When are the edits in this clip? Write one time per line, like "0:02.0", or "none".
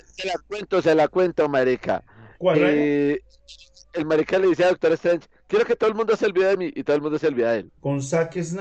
0:02.5
0:07.7